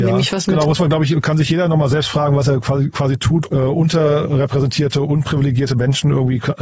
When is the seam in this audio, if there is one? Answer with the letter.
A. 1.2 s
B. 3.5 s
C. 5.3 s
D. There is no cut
B